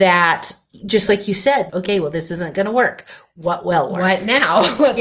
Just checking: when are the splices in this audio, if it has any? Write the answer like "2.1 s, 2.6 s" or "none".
1.7 s